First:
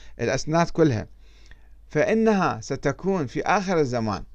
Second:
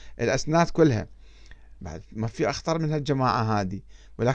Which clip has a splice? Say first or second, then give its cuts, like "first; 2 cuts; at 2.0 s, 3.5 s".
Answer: second; 1 cut; at 1.8 s